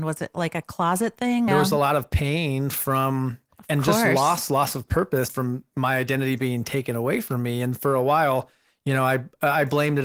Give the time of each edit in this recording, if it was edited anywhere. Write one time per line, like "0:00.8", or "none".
0:01.5
0:05.3